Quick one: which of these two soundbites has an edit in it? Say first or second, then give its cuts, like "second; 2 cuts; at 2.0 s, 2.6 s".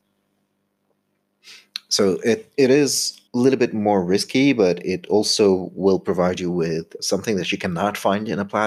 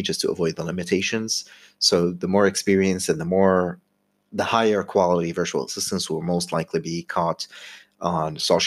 first; 2 cuts; at 3.3 s, 7.0 s